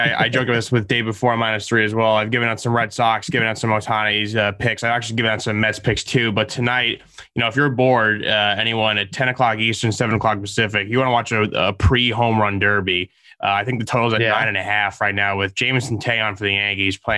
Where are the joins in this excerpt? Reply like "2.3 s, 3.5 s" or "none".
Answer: none

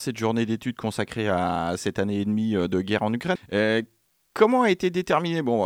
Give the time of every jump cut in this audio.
3.4 s

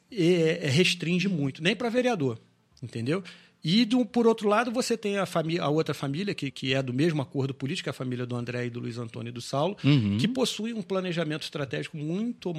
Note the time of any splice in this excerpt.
6.5 s

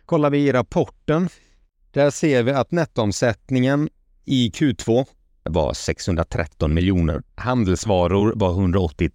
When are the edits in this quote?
5.5 s, 7.3 s

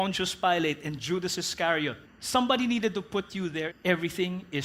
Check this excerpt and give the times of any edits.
2.0 s, 3.7 s

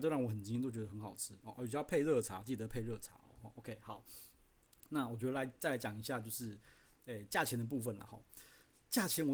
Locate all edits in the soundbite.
none

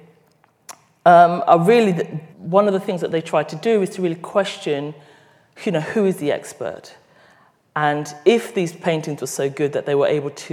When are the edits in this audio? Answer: 2.3 s

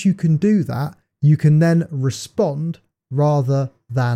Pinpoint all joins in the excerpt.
none

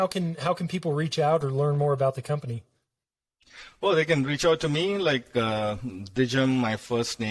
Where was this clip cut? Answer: none

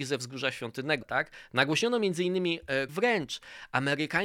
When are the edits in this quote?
1.0 s, 2.9 s

